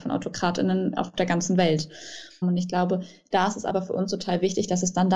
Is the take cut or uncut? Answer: cut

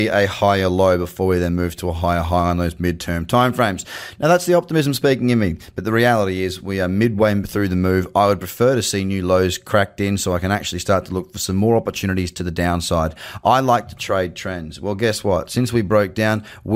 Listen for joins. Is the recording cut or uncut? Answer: uncut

